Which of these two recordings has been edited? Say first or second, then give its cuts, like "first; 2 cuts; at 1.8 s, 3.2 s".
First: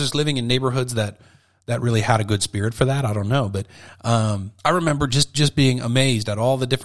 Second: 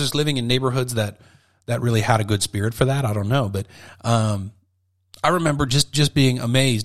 first; 1 cut; at 4.6 s